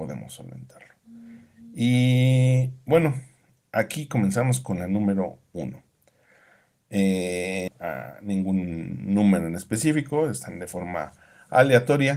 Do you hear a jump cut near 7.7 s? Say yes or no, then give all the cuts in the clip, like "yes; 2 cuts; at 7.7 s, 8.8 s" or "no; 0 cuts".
yes; 1 cut; at 7.7 s